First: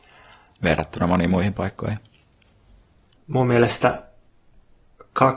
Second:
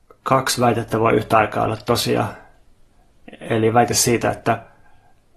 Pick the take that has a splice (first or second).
first